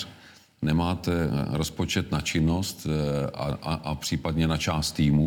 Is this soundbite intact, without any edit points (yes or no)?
yes